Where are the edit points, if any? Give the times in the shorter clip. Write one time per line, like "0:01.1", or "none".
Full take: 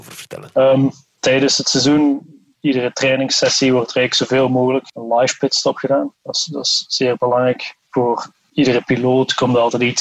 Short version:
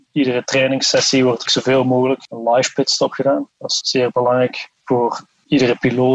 0:01.5
0:03.8